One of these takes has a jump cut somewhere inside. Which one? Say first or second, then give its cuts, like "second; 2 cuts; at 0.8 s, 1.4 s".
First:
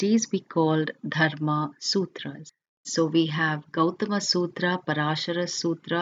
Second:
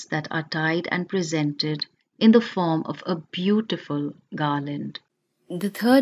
first; 1 cut; at 2.8 s